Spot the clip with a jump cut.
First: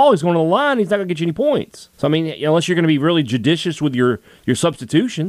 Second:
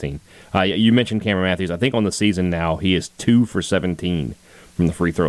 first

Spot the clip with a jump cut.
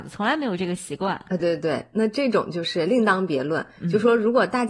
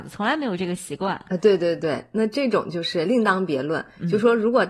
first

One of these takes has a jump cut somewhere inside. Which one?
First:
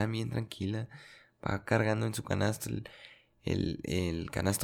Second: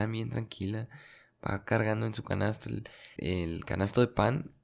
second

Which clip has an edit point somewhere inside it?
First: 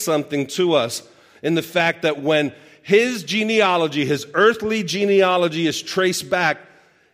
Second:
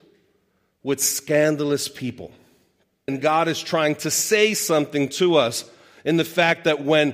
second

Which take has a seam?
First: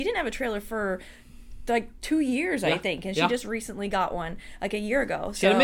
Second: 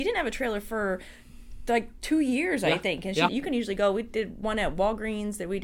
second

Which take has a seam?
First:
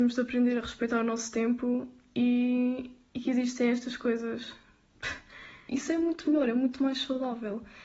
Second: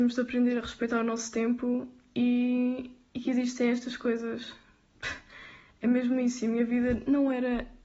first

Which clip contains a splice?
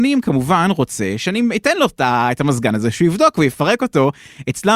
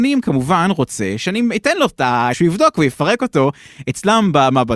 second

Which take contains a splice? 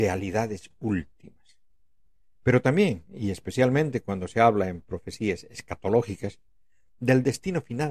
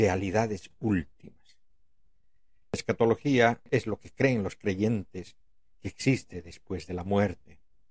first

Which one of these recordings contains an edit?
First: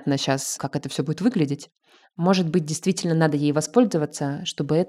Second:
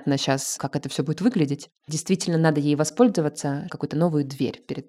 second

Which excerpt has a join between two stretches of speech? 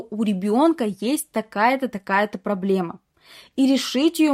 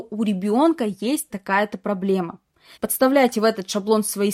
second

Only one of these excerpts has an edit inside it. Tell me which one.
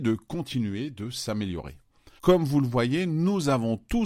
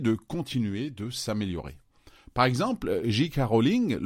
first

